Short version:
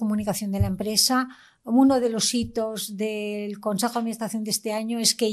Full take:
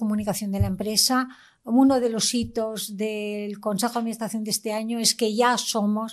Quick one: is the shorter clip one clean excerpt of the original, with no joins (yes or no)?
yes